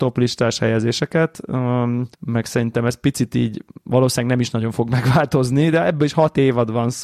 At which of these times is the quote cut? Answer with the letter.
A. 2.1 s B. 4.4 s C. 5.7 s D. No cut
A